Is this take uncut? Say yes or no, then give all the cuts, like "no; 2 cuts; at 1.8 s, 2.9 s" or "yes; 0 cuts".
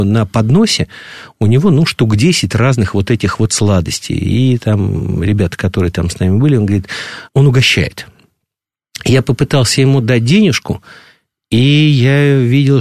no; 1 cut; at 7.3 s